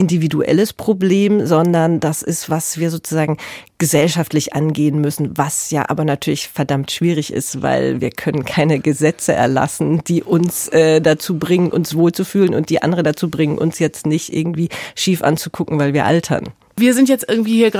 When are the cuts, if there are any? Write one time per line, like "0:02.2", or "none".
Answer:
0:02.5